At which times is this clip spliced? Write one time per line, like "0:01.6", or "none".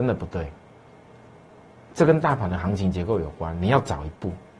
none